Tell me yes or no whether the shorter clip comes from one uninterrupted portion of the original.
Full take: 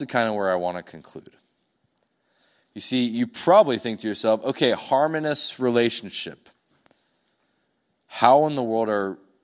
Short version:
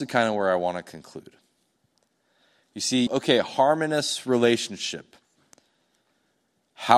no